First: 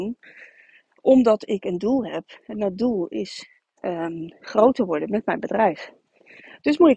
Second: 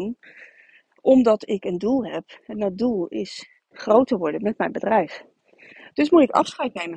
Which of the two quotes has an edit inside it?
second; 1 cut; at 3.7 s

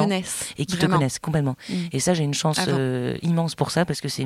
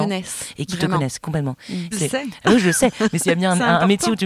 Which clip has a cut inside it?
second; 1 cut; at 1.9 s

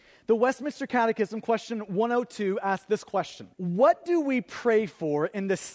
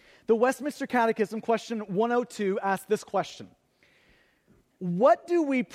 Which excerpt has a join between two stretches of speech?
first; 1 cut; at 3.5 s

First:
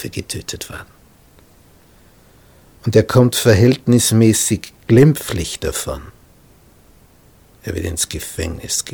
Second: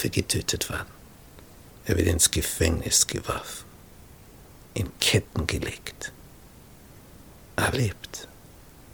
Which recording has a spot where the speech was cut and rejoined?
second; 2 cuts; at 1.7 s, 7.7 s

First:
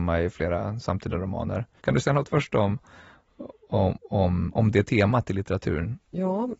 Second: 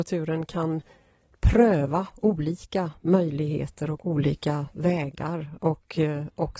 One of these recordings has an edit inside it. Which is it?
first; 1 cut; at 1.8 s

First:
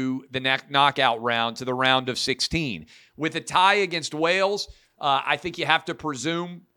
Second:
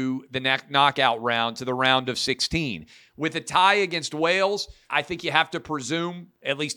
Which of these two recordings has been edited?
second; 1 cut; at 4.9 s

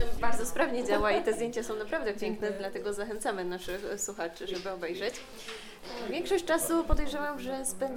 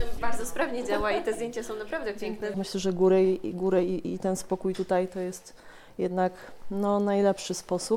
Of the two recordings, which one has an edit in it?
second; 1 cut; at 2.5 s

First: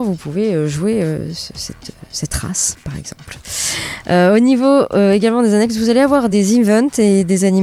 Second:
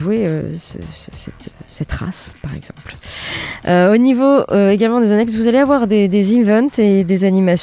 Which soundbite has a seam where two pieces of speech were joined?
first; 2 cuts; at 1.3 s, 6.3 s

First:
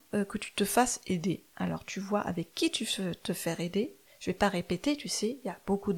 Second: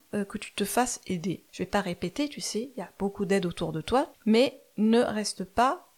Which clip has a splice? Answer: second; 2 cuts; at 1.5 s, 4.1 s

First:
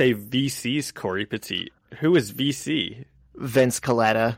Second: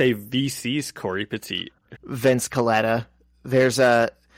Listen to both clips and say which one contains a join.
second; 1 cut; at 2.0 s

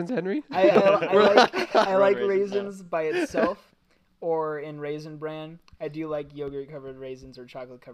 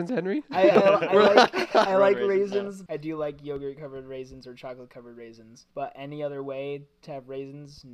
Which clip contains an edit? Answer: second; 2 cuts; at 2.9 s, 5.7 s

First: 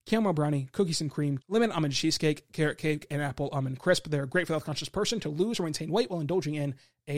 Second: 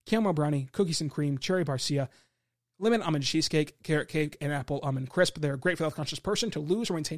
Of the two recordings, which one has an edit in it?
first; 1 cut; at 1.4 s

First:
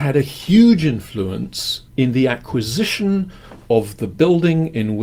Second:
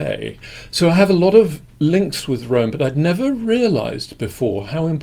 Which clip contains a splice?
first; 1 cut; at 1.9 s

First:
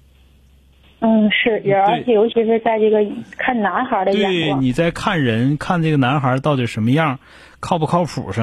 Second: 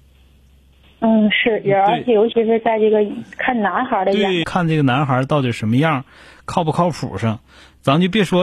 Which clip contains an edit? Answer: second; 1 cut; at 4.4 s

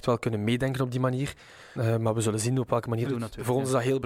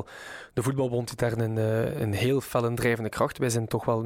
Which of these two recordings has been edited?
first; 2 cuts; at 1.8 s, 3.1 s

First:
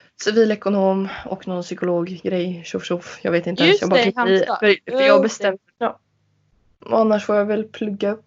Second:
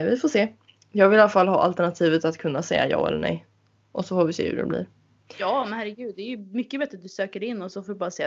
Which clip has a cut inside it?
first; 1 cut; at 5.7 s

